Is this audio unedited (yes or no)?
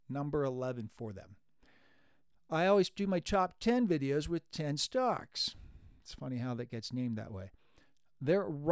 yes